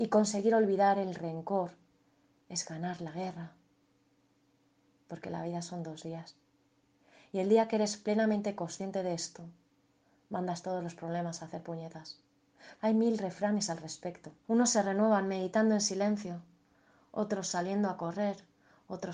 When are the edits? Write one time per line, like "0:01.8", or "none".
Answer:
0:12.8
0:14.4